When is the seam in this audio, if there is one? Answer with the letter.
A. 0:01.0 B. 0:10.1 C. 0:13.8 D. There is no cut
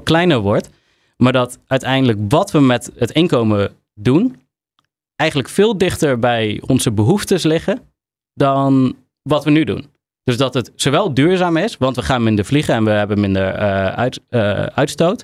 D